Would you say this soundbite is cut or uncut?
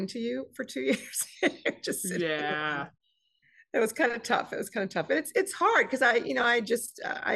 uncut